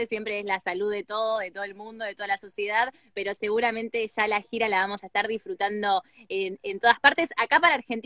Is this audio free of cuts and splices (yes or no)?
no